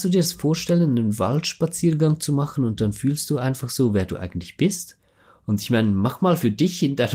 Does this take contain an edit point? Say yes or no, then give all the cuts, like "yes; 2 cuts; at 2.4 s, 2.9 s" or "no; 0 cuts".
no; 0 cuts